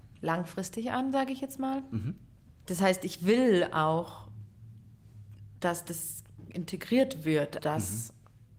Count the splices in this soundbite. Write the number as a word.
one